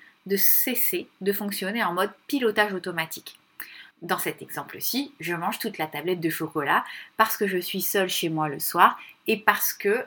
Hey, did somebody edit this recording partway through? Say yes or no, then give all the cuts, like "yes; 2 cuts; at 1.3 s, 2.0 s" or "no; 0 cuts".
yes; 1 cut; at 3.9 s